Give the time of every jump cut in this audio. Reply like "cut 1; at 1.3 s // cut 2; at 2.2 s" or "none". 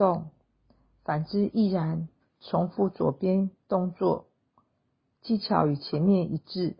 cut 1; at 2.2 s